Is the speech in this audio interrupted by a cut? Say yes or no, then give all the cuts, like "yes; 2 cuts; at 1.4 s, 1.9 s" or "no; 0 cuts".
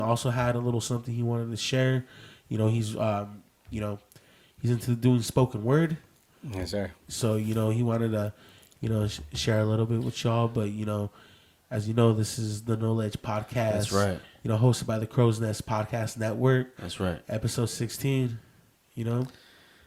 no; 0 cuts